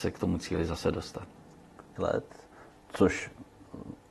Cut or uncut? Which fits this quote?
cut